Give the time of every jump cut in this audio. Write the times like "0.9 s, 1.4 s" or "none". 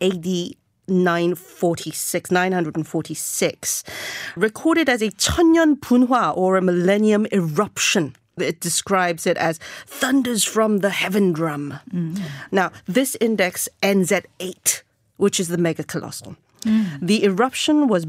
4.4 s, 12.5 s